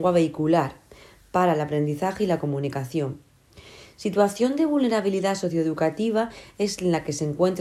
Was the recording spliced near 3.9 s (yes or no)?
no